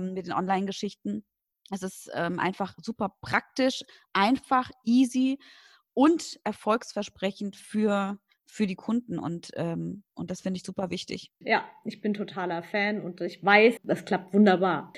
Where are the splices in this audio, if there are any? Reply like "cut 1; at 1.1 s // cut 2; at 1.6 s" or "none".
cut 1; at 11.4 s // cut 2; at 13.8 s